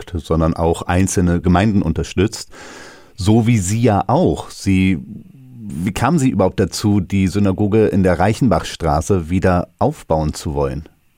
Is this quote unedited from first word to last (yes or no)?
yes